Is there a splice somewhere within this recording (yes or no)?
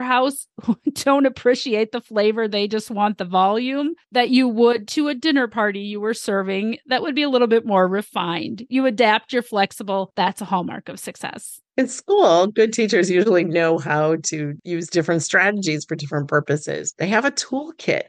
no